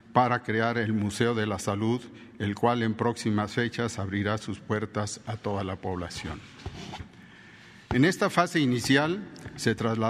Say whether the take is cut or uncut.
uncut